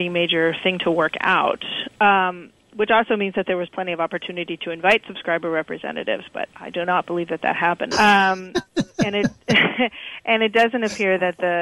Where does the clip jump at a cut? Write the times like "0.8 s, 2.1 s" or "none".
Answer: 7.9 s